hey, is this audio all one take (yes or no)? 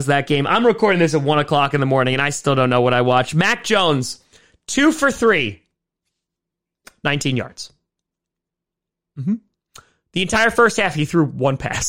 yes